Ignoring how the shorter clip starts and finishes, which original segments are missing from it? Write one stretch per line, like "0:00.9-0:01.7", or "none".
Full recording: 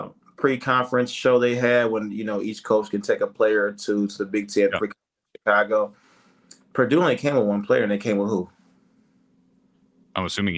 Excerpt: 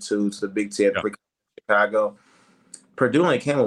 none

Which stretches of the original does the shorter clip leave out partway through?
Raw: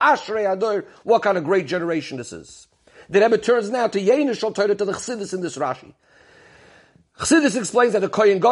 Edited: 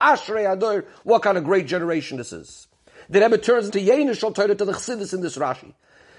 0:03.7-0:03.9

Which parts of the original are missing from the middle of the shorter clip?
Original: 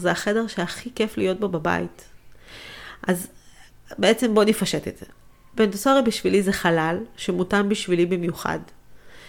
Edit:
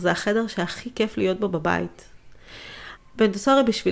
0:03.0-0:05.4

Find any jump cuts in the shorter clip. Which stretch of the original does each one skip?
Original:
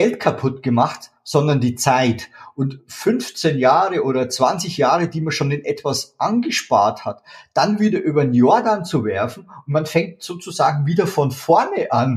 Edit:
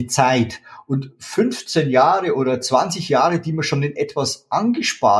none

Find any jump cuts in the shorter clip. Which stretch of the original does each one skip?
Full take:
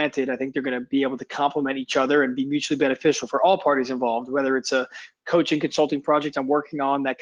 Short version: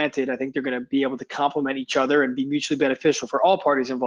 none

